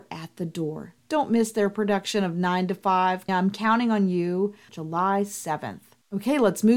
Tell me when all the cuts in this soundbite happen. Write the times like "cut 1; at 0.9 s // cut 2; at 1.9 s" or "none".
cut 1; at 1.0 s // cut 2; at 3.3 s // cut 3; at 4.7 s